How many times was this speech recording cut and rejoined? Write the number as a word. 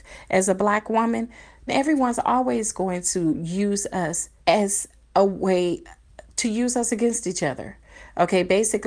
two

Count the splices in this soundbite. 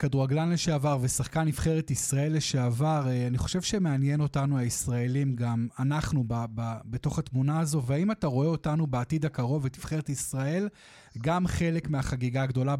zero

